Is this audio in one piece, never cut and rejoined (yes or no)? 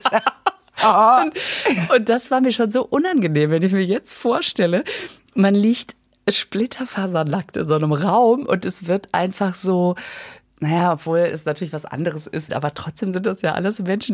no